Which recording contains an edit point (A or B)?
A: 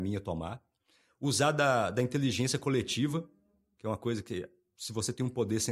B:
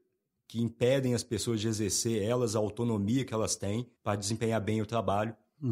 B